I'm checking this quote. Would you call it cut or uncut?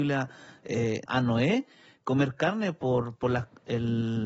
cut